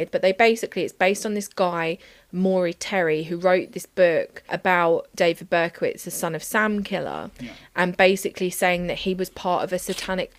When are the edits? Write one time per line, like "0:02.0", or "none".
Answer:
0:04.5